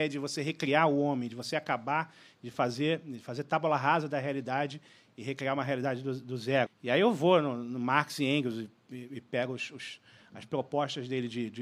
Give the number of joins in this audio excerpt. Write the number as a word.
one